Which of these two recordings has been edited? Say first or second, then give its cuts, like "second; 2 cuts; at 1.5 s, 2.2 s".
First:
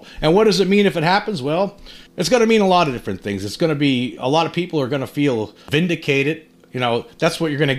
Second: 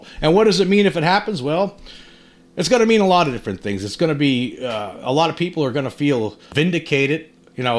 first; 2 cuts; at 2.1 s, 4.2 s